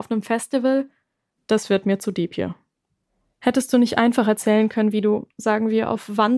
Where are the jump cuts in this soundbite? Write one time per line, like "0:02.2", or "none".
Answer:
0:01.4